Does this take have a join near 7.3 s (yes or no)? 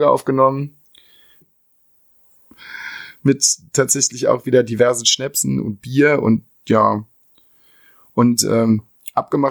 no